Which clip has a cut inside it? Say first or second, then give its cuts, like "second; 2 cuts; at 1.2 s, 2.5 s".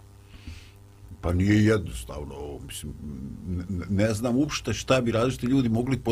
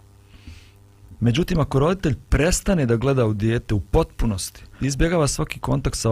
second; 2 cuts; at 1.2 s, 4.8 s